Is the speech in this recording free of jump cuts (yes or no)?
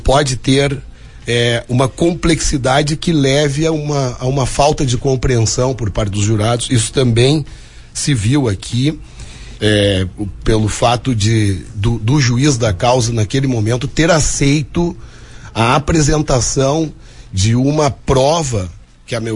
no